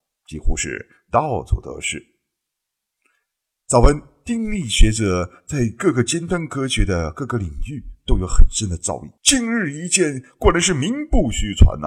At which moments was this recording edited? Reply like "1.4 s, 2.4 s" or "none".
9.2 s